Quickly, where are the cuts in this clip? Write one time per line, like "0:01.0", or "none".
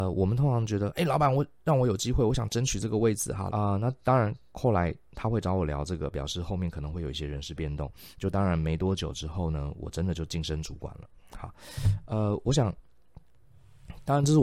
0:03.5